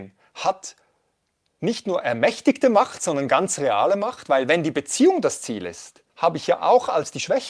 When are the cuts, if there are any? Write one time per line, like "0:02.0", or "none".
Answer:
0:06.1